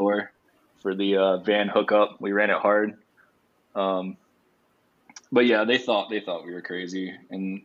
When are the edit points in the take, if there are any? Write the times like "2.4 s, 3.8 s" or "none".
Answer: none